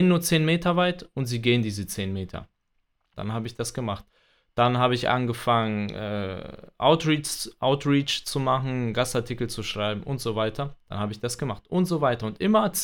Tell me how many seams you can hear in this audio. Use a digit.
1